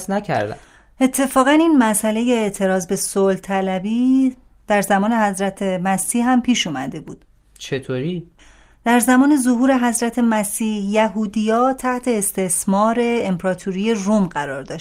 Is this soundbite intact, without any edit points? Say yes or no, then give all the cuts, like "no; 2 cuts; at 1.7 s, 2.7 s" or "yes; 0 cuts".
yes; 0 cuts